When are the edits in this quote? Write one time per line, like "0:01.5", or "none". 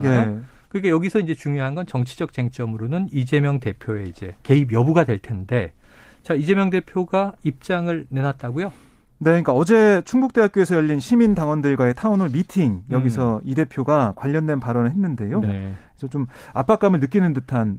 0:04.4
0:15.4